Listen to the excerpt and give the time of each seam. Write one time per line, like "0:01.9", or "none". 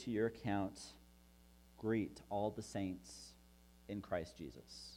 0:01.6